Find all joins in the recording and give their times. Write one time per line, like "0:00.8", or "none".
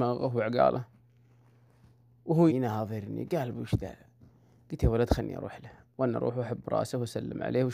0:02.5